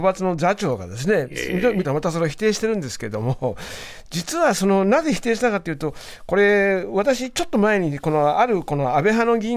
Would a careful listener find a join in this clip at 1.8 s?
yes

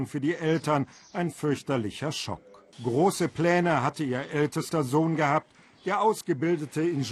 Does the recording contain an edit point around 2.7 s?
yes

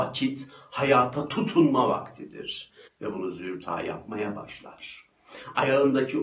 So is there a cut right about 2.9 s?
yes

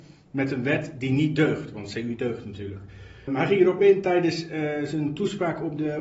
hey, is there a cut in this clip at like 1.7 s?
no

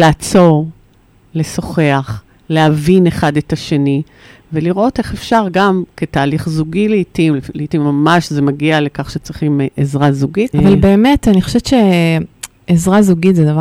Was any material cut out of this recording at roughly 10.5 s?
yes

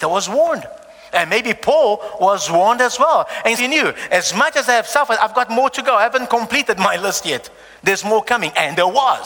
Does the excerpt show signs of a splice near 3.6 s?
yes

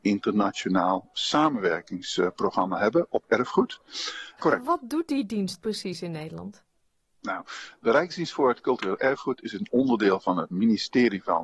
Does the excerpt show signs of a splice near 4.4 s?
yes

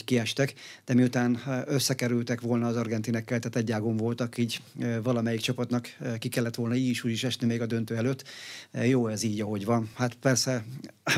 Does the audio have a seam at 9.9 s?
yes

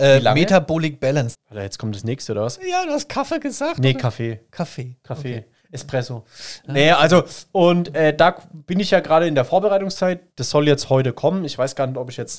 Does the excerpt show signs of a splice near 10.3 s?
yes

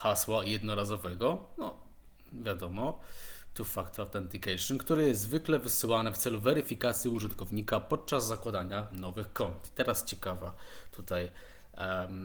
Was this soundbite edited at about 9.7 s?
no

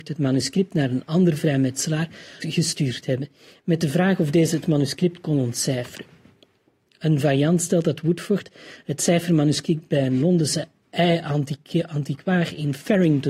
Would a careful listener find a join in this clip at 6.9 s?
yes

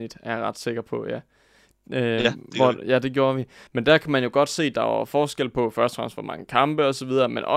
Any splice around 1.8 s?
no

